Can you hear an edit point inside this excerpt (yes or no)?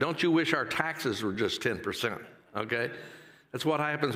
no